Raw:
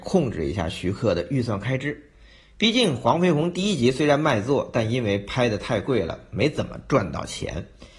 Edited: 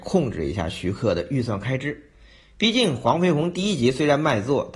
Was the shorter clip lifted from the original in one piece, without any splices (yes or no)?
yes